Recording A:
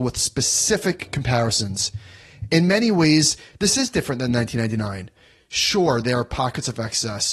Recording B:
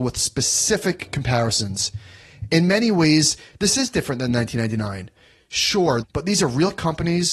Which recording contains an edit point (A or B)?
B